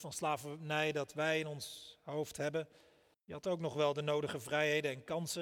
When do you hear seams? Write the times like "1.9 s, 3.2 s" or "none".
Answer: 3.1 s

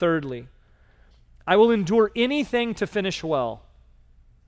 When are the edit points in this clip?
none

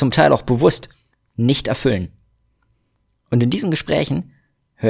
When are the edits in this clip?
none

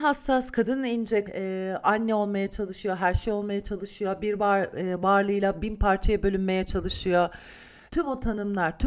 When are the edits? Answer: 1.3 s, 7.9 s

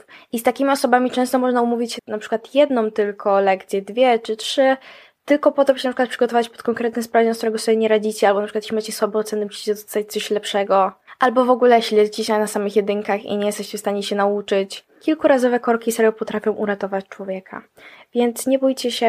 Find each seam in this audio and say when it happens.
2.0 s

